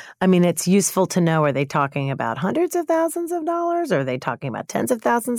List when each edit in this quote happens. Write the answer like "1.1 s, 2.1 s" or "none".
none